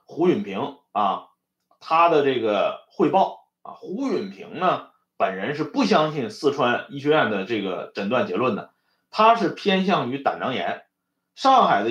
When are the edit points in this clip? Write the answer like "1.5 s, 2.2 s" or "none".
none